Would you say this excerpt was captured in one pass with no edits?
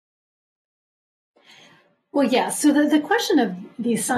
yes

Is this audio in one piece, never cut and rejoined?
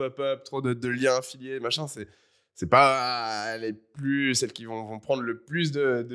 yes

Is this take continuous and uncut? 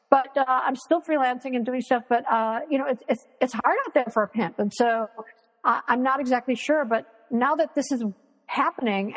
yes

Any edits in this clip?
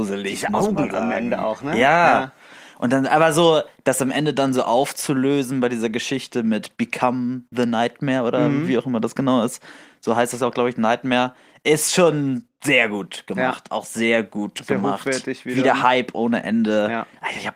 no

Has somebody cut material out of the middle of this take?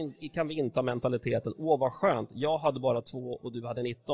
no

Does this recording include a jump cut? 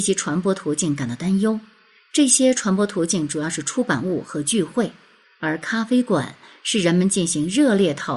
no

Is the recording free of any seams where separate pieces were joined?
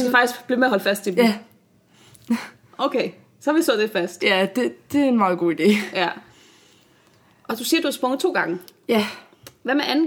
yes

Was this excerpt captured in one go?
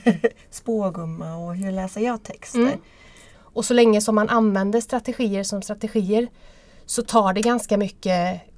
no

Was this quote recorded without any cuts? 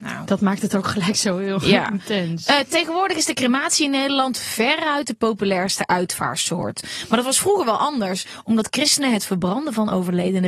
yes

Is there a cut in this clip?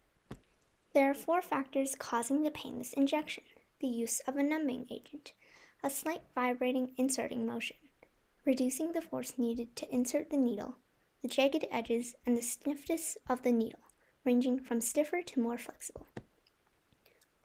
no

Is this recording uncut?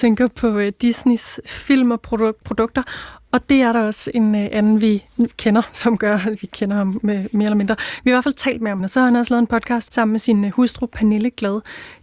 no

